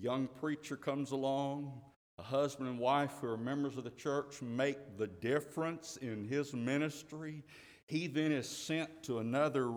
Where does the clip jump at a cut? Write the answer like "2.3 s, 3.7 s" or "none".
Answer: none